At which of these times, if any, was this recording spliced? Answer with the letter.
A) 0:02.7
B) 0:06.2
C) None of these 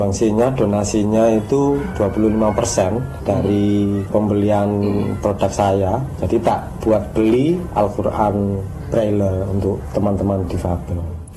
C